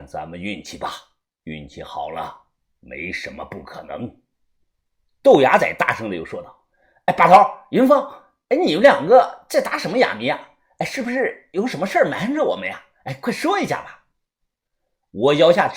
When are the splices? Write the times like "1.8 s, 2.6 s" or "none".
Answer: none